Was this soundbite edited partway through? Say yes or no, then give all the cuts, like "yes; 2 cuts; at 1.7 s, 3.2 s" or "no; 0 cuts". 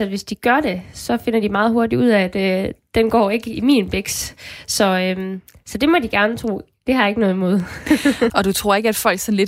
yes; 1 cut; at 8.3 s